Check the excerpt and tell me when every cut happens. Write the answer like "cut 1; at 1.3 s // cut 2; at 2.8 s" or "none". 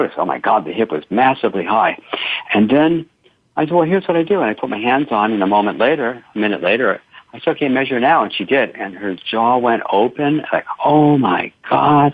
none